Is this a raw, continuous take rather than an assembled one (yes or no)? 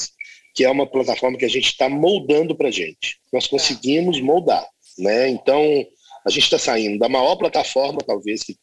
no